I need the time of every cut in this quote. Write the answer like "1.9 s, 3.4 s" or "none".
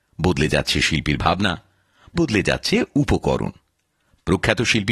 2.2 s

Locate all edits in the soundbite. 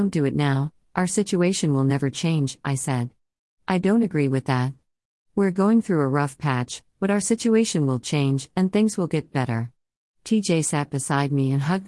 none

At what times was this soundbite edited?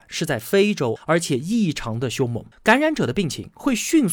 1.0 s, 2.5 s

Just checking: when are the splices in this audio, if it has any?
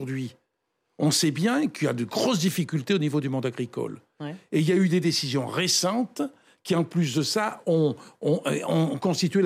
none

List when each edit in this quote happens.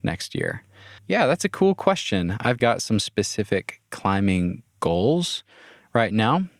1.0 s, 2.6 s

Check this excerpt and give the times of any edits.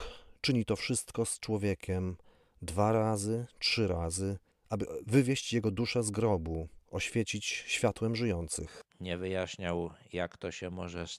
8.9 s

